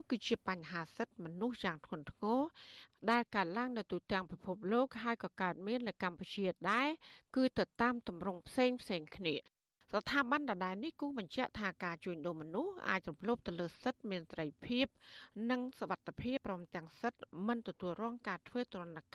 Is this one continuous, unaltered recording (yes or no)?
no